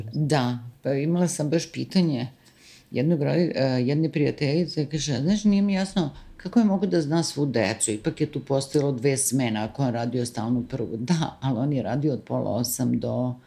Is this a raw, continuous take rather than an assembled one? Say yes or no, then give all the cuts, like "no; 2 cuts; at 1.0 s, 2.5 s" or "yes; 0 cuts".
yes; 0 cuts